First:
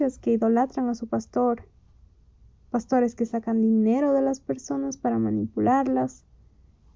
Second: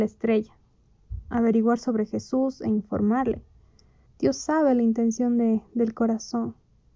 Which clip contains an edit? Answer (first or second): second